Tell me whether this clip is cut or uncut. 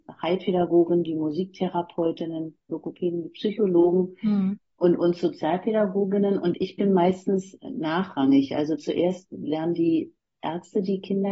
uncut